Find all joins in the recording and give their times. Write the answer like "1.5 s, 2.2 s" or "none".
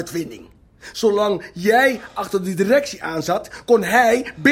none

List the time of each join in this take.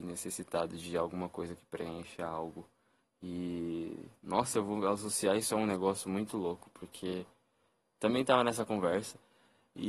none

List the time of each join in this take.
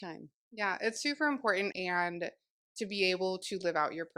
1.7 s

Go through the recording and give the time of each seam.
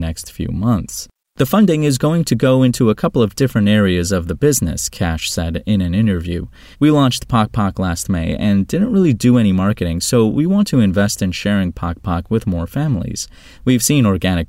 6.7 s

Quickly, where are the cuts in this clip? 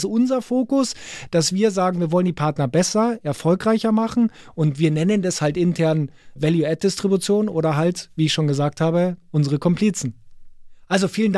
none

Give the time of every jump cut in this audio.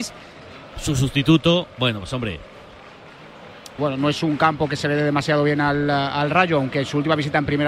3.8 s

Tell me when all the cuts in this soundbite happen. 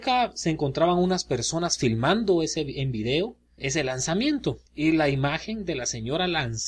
3.6 s, 4.7 s

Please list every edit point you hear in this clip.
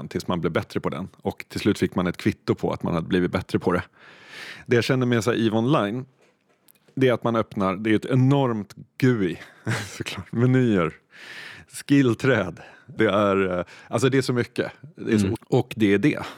13.0 s, 15.3 s

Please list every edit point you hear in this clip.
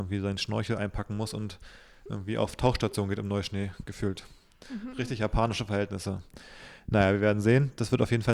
none

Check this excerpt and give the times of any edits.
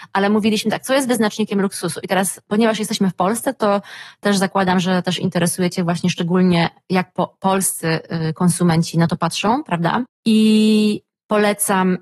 10.1 s

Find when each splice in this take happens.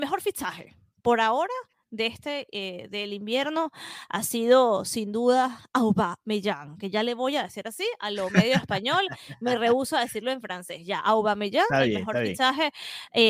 none

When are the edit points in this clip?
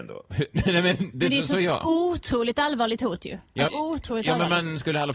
3.7 s

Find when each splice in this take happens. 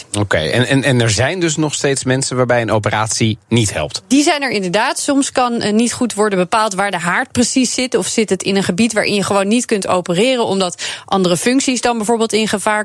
none

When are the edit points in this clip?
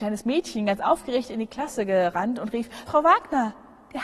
2.9 s

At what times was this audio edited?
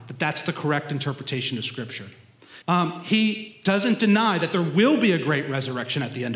2.6 s

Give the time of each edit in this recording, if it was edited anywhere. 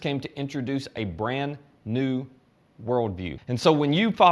3.4 s

